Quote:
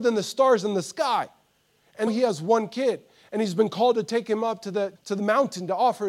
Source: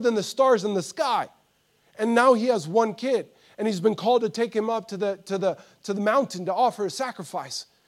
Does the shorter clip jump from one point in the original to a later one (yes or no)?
yes